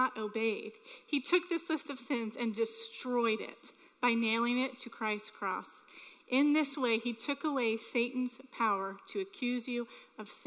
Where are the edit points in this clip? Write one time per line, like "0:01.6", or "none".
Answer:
none